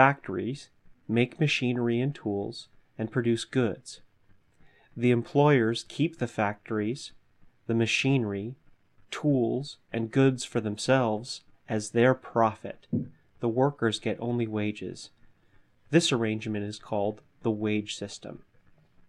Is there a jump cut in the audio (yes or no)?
no